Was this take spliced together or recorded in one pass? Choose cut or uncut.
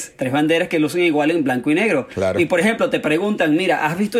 uncut